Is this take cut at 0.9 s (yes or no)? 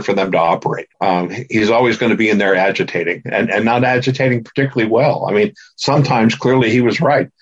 yes